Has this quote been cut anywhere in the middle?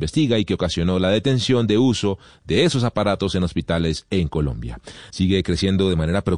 yes; 1 cut; at 5.1 s

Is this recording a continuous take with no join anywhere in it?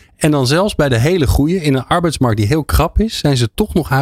yes; 0 cuts

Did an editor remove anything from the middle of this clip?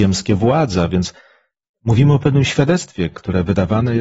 no; 0 cuts

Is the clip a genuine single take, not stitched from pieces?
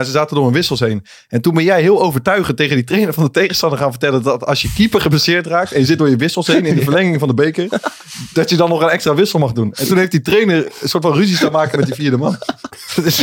yes; 0 cuts

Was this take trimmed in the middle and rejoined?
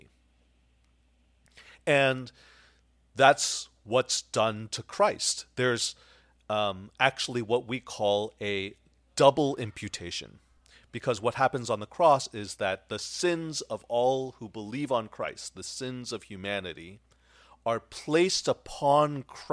no; 0 cuts

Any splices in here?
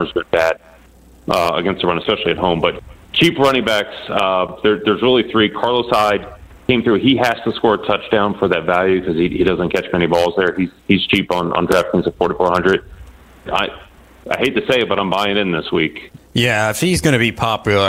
yes; 2 cuts; at 13.5 s, 16.2 s

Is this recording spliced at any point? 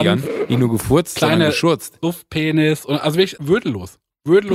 yes; 1 cut; at 3.4 s

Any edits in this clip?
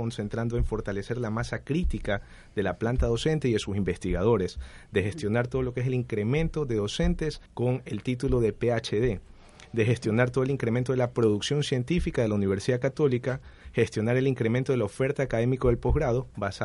yes; 1 cut; at 7.5 s

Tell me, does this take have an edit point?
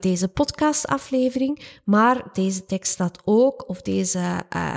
no; 0 cuts

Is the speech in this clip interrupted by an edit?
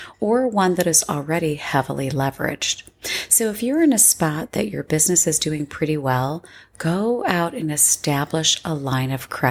no; 0 cuts

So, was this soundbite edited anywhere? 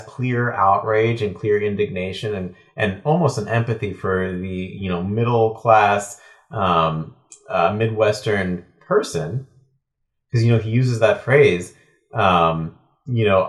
no; 0 cuts

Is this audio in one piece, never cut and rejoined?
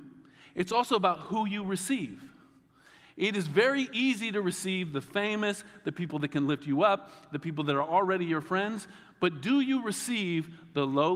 yes; 0 cuts

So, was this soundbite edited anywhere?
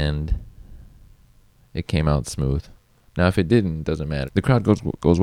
yes; 1 cut; at 4.2 s

